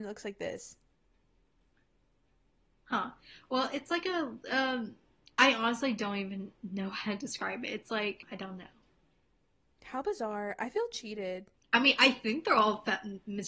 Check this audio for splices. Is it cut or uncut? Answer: uncut